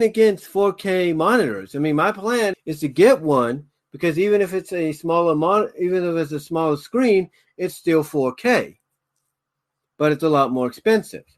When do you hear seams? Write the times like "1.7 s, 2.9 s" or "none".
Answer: 2.5 s